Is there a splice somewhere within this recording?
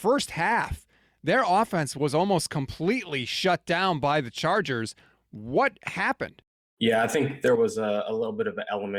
no; 0 cuts

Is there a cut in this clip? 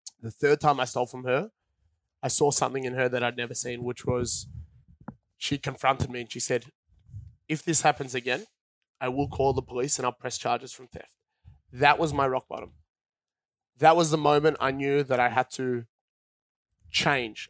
no; 0 cuts

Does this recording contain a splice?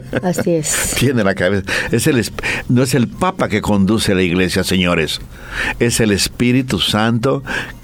no; 0 cuts

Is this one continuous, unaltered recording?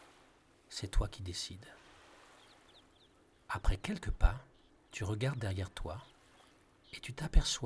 no; 1 cut; at 3.5 s

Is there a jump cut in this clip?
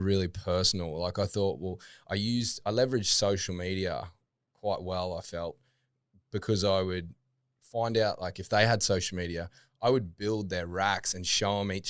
no; 0 cuts

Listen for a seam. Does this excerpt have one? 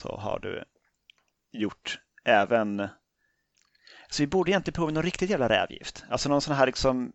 no; 0 cuts

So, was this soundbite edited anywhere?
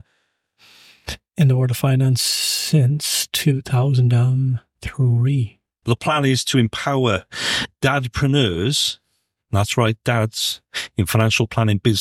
yes; 1 cut; at 5.8 s

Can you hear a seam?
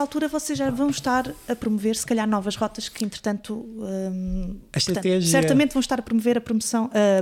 no; 0 cuts

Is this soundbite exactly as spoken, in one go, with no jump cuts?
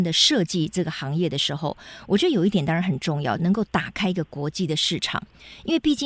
no; 1 cut; at 3.4 s

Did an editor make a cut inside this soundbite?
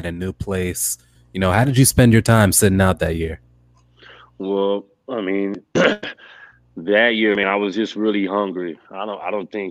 yes; 1 cut; at 1.2 s

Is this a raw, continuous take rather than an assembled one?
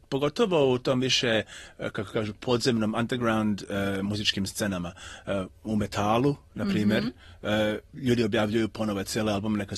yes; 0 cuts

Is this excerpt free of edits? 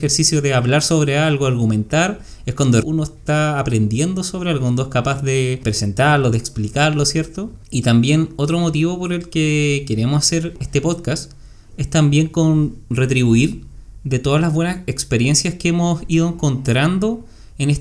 no; 2 cuts; at 2.8 s, 6.3 s

